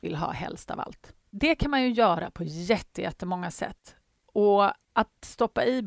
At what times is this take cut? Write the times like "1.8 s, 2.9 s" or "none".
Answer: 1.3 s